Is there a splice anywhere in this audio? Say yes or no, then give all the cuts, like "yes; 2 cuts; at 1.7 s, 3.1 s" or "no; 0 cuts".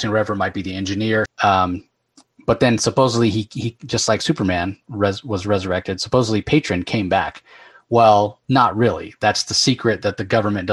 yes; 1 cut; at 1.3 s